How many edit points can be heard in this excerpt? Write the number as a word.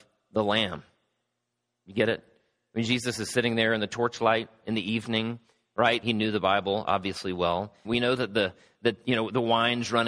two